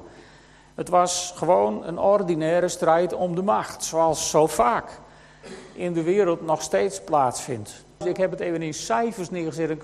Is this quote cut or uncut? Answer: cut